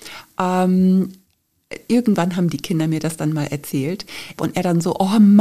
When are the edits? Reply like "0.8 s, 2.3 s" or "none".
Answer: 4.4 s